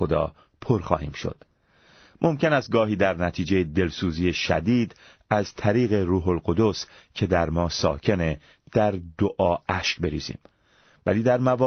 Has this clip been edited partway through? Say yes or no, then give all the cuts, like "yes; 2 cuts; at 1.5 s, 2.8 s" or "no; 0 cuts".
no; 0 cuts